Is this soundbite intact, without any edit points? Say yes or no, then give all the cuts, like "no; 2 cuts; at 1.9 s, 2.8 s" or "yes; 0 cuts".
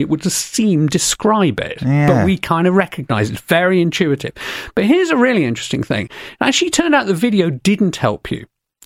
yes; 0 cuts